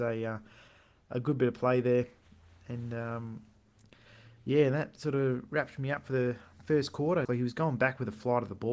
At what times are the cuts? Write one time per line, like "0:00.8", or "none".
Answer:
0:07.2

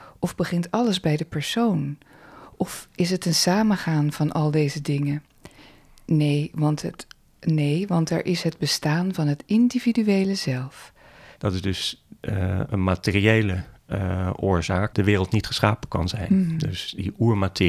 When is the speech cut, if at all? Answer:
0:11.4
0:14.9

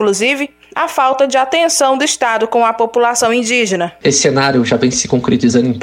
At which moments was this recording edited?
0:04.0

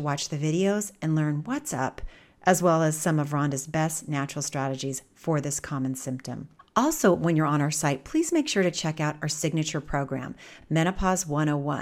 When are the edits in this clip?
none

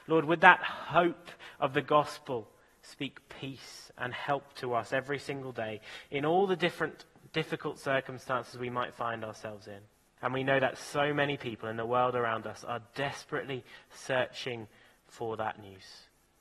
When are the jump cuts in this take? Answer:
0:10.2

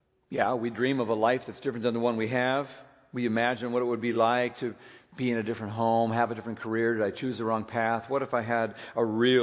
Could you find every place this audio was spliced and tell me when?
none

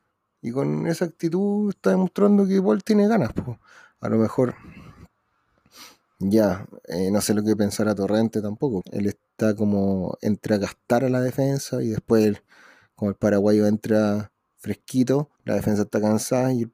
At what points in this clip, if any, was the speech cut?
0:08.8
0:15.4

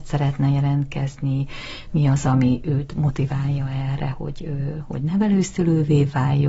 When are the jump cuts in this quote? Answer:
none

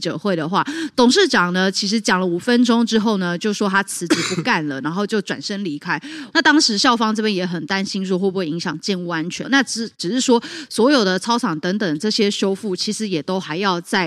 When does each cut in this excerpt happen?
0:06.3
0:09.4

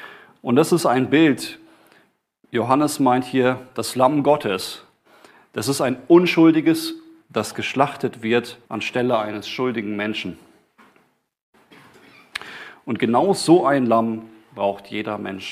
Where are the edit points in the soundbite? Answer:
0:07.2
0:08.6

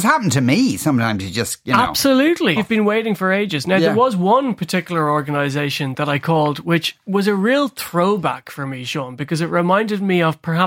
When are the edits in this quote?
0:02.6

